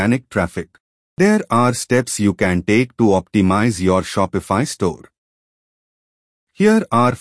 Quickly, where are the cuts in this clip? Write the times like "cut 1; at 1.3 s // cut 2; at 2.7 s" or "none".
none